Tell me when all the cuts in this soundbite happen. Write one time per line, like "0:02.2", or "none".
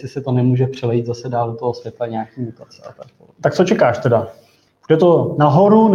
none